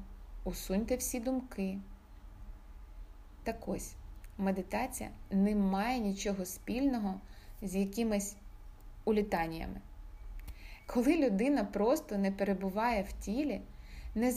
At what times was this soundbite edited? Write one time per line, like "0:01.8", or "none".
none